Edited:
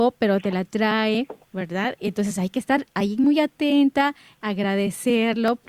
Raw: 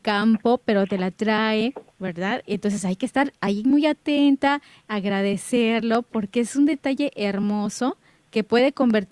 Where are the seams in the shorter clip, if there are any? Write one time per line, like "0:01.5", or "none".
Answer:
none